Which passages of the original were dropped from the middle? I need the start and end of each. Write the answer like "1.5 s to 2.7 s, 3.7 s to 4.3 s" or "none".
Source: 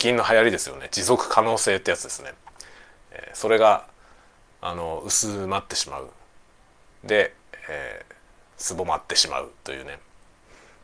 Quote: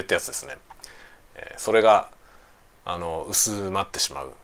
none